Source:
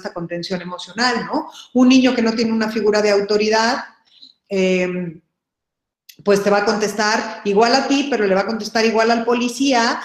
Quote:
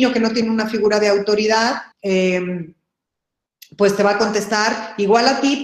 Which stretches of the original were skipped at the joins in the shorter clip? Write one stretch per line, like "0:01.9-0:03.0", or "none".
0:03.9-0:04.4